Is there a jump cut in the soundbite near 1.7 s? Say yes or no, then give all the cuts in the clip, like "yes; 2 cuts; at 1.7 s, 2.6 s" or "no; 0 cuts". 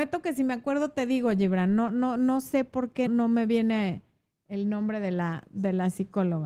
no; 1 cut; at 3.1 s